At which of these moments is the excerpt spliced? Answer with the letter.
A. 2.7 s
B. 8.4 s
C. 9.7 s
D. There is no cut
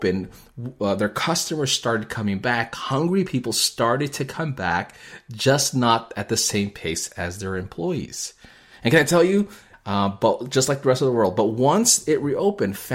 C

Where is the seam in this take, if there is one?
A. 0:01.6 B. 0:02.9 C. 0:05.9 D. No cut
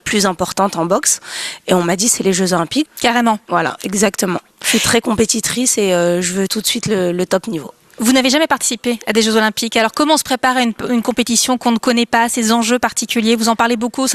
B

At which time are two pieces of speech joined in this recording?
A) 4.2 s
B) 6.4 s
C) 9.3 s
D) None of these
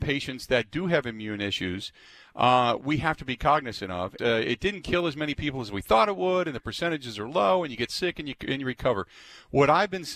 A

